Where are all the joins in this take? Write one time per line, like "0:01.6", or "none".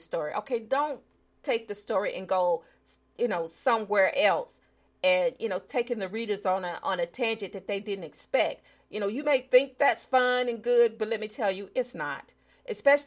none